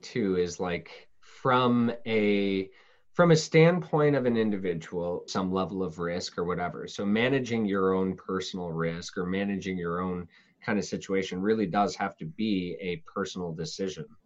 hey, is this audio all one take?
no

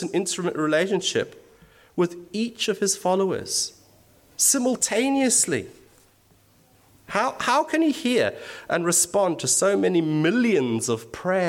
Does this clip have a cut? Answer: yes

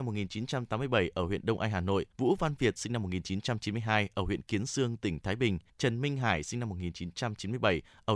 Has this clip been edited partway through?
yes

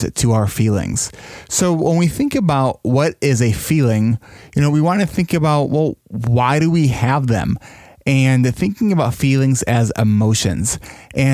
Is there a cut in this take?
no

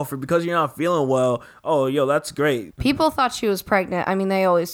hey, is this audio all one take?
no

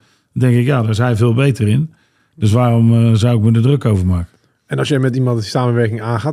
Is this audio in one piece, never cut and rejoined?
yes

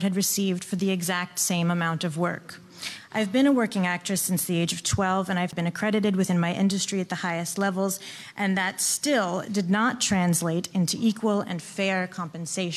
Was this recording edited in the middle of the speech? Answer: no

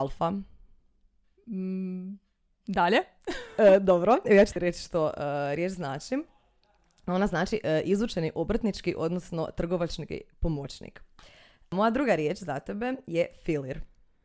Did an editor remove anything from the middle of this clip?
no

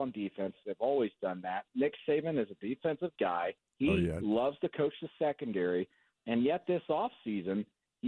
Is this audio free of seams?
yes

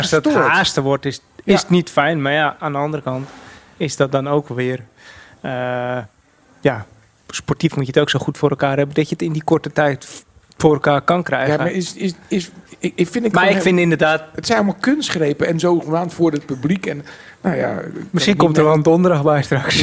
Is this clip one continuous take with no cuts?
yes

